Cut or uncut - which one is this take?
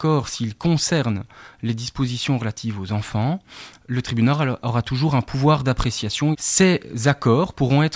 cut